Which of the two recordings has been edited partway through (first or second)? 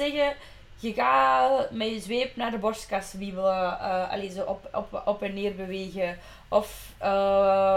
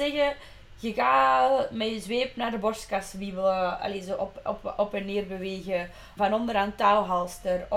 second